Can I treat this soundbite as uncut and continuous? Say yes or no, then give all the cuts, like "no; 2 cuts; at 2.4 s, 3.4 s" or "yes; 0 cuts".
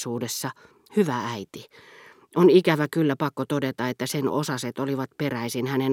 yes; 0 cuts